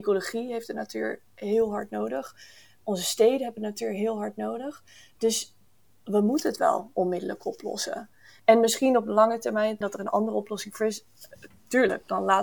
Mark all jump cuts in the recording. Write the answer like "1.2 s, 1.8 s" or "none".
8.4 s, 9.8 s